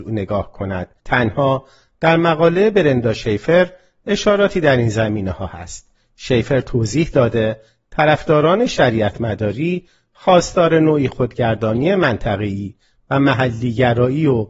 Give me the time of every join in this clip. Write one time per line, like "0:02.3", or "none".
0:01.0